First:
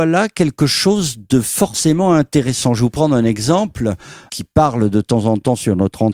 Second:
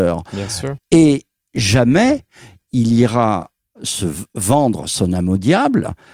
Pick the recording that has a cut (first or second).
first